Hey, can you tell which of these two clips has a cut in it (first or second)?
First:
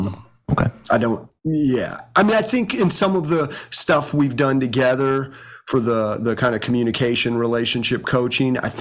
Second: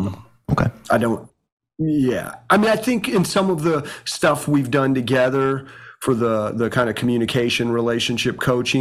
first